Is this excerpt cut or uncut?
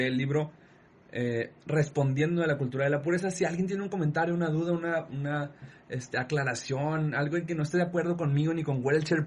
uncut